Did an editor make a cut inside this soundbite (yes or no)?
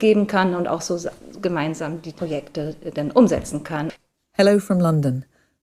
no